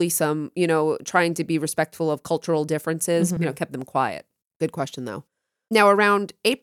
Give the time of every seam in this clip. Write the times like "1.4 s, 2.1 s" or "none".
3.4 s